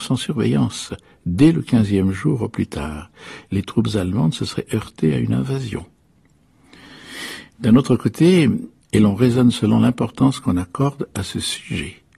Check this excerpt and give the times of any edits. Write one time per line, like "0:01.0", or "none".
0:03.4
0:08.8

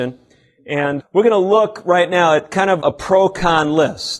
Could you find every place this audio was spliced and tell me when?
0:01.0
0:02.8

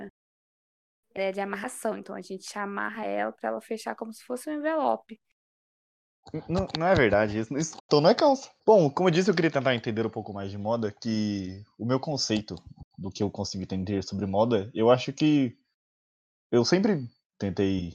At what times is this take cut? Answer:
0:07.8

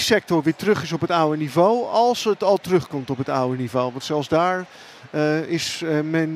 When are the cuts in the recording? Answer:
none

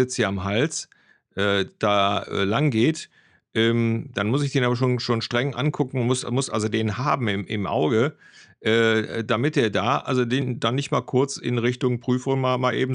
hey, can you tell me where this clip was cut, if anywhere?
none

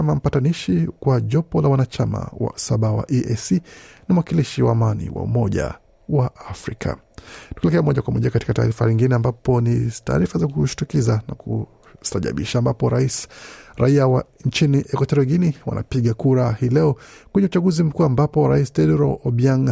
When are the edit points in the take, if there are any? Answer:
none

